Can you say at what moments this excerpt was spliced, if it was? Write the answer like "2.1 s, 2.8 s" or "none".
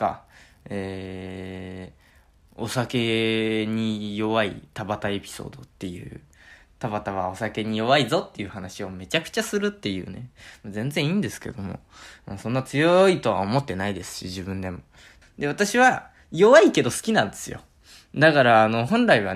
15.2 s

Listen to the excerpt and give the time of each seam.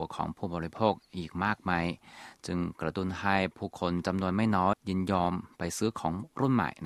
4.7 s

